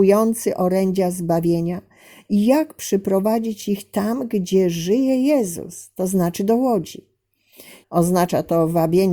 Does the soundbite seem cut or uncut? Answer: cut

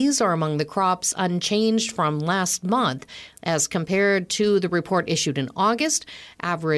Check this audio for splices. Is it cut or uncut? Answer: cut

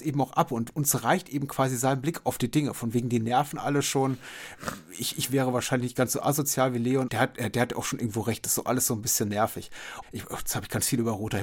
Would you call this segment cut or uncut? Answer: cut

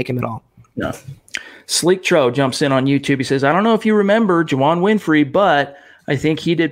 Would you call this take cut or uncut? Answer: uncut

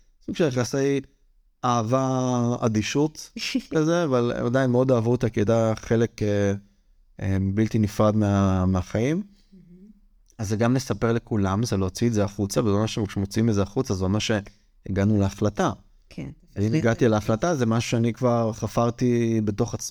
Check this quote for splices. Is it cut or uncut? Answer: uncut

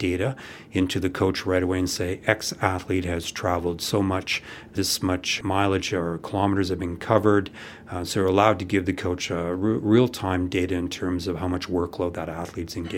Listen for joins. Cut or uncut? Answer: cut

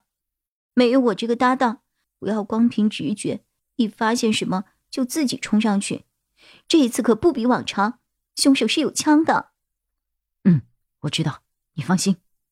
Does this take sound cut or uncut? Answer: cut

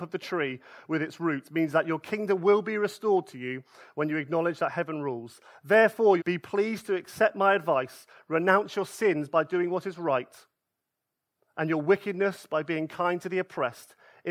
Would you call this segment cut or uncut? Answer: cut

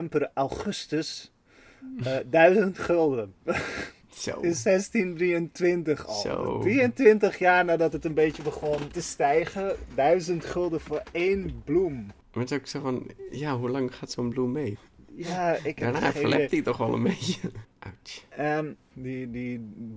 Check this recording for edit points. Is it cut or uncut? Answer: cut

